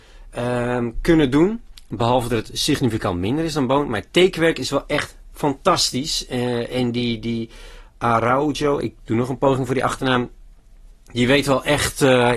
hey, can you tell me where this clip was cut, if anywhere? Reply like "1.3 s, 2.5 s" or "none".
none

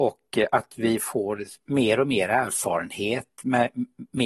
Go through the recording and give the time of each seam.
none

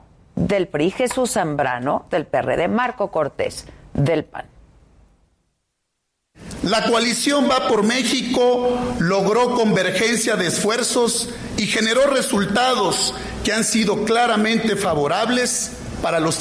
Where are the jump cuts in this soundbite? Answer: none

